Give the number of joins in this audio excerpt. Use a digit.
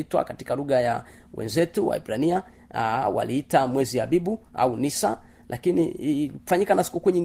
0